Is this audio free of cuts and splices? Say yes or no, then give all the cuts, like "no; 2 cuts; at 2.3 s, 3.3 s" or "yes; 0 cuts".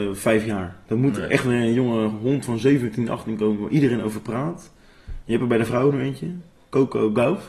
yes; 0 cuts